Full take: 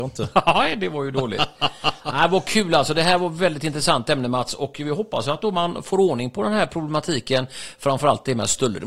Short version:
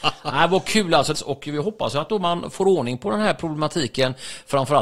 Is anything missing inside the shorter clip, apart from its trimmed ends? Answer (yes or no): yes